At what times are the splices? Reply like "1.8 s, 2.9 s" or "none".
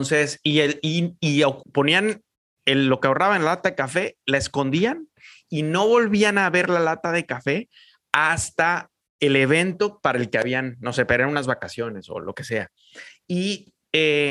1.6 s